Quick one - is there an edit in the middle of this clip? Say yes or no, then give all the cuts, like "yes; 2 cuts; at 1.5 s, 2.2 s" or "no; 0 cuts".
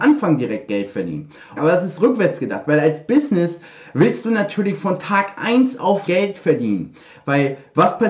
yes; 2 cuts; at 1.6 s, 6.1 s